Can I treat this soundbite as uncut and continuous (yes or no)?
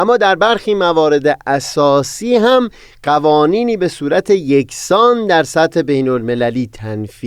yes